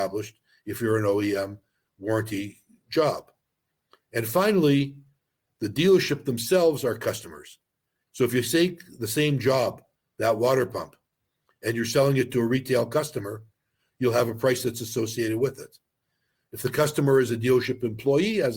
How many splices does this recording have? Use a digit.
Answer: 1